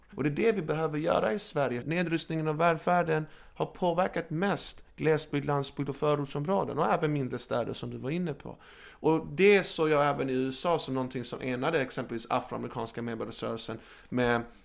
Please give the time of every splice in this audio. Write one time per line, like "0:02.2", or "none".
0:01.8